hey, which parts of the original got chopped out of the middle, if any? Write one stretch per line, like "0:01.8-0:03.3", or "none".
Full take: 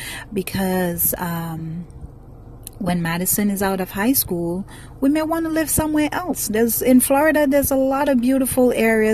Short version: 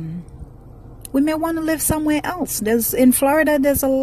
0:02.7-0:05.0